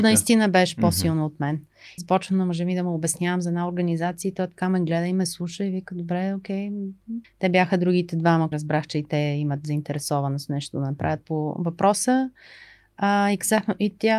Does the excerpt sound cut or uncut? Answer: cut